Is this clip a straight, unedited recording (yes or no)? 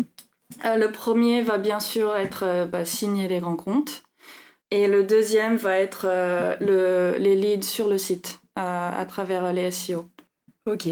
no